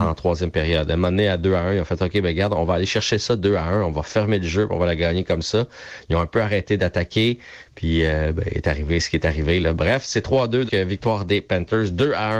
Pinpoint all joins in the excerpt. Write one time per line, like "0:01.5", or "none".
0:10.7

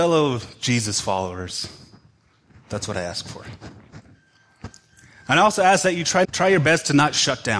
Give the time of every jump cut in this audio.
0:06.2

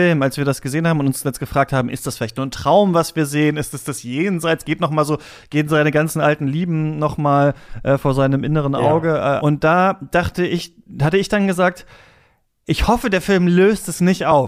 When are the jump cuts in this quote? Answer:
0:09.4

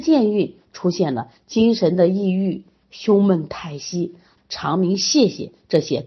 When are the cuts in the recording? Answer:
0:04.4

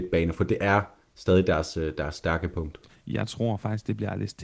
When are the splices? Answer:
0:02.9

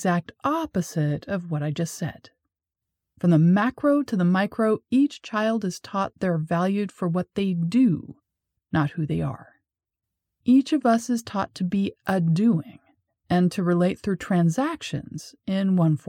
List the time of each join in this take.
0:10.3

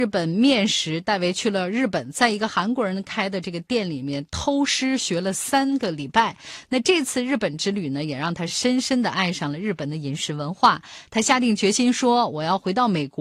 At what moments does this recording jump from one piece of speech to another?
none

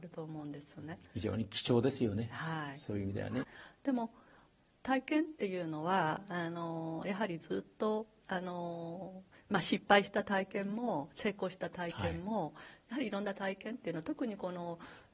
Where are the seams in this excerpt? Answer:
0:03.4

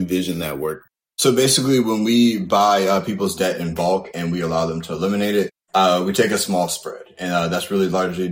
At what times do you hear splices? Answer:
none

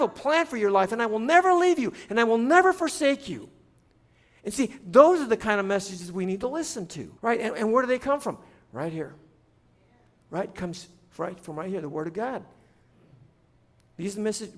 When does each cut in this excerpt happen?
0:07.2

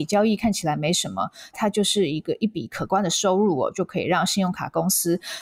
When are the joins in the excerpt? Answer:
0:01.5

